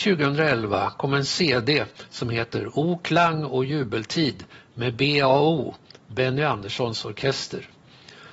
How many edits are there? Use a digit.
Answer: 0